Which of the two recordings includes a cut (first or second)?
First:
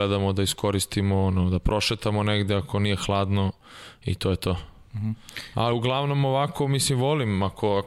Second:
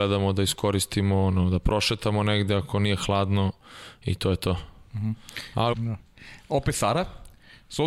second